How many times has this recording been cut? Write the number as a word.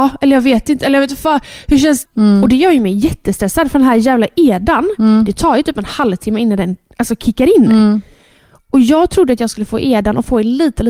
one